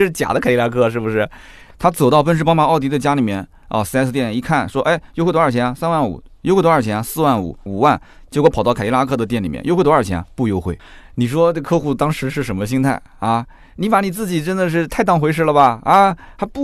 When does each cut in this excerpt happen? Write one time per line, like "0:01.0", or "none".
0:01.7
0:07.7